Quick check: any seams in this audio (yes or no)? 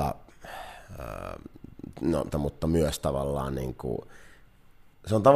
yes